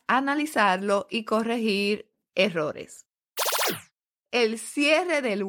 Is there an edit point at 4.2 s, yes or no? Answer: yes